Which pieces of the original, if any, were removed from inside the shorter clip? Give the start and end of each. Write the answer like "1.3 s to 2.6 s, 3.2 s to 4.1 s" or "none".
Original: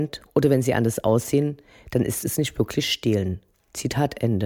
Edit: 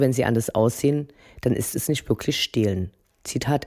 none